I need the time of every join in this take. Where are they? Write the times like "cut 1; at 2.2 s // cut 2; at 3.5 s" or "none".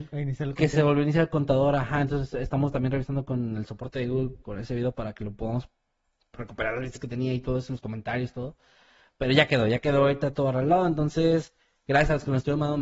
none